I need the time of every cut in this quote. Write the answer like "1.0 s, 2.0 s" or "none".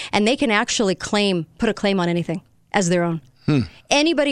none